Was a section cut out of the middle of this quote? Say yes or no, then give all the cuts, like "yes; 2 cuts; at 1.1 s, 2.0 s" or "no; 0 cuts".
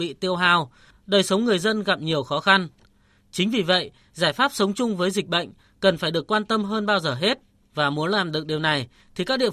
yes; 1 cut; at 7.6 s